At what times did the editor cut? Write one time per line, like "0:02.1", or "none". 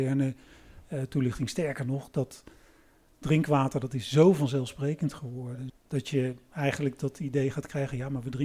0:05.7